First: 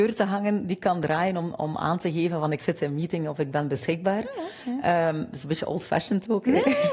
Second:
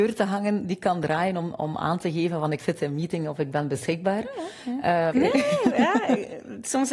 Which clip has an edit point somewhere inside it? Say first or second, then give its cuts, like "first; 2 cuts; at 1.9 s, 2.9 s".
second; 1 cut; at 5.1 s